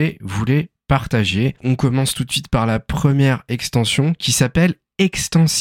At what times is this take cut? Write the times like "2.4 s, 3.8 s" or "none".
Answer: 1.6 s